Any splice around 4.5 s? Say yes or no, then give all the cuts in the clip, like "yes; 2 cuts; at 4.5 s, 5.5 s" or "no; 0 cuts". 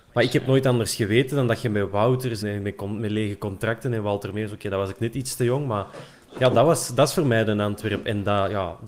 no; 1 cut; at 2.4 s